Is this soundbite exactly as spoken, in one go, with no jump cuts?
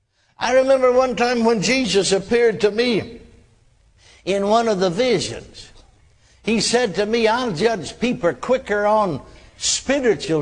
yes; 0 cuts

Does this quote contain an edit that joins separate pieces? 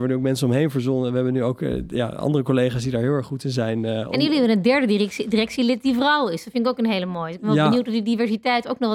no; 0 cuts

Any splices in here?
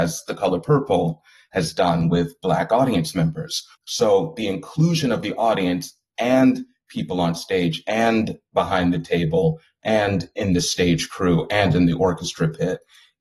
yes; 1 cut; at 3.7 s

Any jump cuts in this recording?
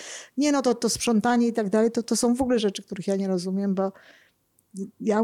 no; 0 cuts

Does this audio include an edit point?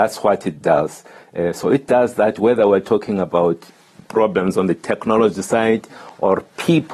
no; 0 cuts

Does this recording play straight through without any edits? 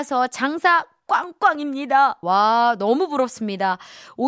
no; 1 cut; at 2.2 s

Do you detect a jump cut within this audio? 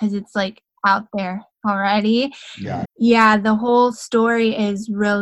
yes; 1 cut; at 2.8 s

